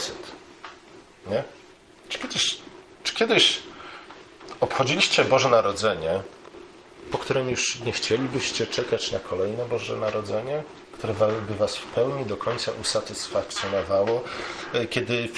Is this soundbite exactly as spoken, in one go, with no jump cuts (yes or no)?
yes